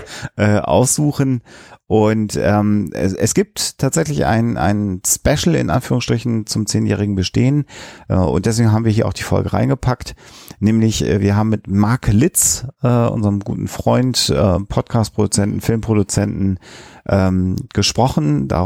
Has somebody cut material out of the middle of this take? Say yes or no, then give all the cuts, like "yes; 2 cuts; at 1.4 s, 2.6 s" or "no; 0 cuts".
no; 0 cuts